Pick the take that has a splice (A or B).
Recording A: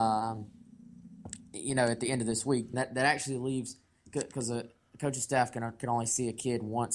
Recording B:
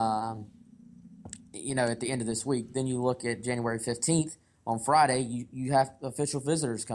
A